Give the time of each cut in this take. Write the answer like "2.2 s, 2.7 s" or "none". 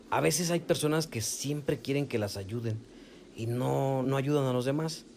4.0 s